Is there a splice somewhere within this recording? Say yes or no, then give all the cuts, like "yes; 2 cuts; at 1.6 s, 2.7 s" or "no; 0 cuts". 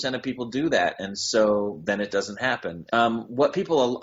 yes; 1 cut; at 2.9 s